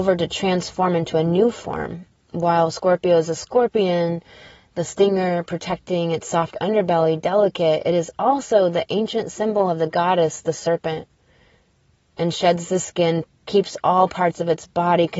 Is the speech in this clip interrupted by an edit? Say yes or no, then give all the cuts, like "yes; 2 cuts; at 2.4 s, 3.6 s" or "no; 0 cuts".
yes; 1 cut; at 13.2 s